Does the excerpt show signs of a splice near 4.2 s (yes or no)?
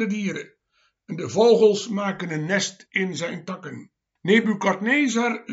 yes